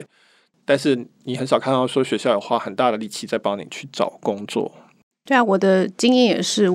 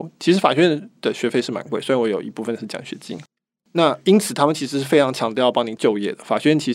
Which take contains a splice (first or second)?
first